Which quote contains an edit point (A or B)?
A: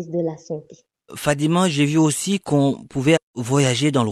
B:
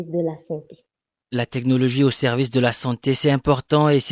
A